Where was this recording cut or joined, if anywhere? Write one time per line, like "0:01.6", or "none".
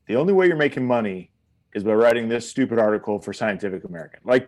none